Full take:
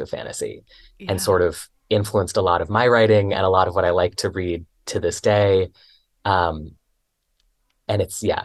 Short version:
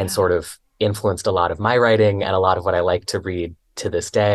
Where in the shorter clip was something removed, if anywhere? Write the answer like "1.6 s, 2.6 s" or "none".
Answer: none